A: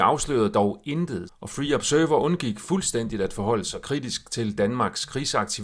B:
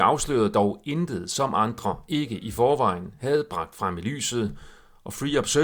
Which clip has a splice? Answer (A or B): A